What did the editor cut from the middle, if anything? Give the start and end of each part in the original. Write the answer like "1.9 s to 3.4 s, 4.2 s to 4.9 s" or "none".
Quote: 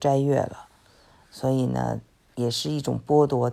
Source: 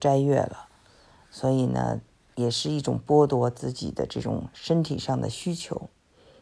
none

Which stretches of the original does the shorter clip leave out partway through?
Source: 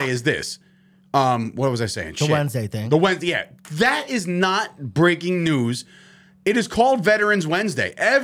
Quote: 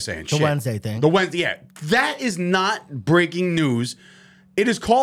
none

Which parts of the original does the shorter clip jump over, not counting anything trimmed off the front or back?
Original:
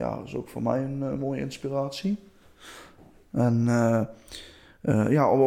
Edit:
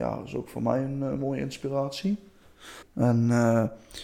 2.8 s to 3.2 s

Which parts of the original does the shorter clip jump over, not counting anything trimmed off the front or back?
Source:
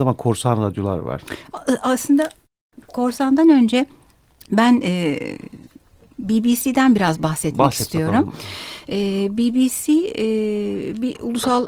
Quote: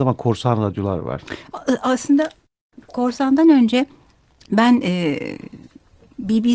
none

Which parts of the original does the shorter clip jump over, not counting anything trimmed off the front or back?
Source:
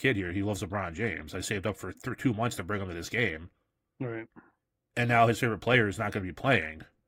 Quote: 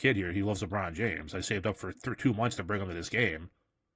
none

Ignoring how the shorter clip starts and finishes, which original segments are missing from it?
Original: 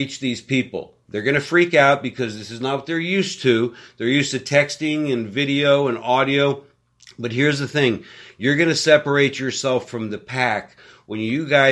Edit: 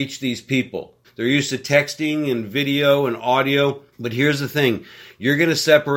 1.0 s to 3.9 s, 6.7 s to 7.1 s

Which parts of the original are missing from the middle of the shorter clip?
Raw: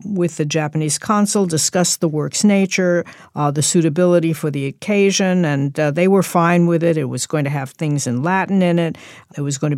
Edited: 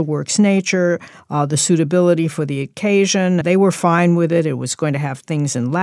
5.5 s to 5.9 s

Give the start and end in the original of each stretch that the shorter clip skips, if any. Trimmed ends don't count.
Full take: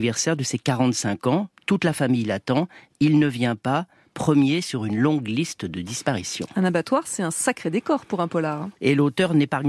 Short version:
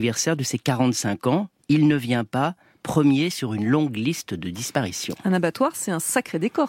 1.6 s to 2.9 s

